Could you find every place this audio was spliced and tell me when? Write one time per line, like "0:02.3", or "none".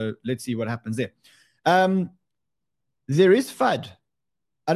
none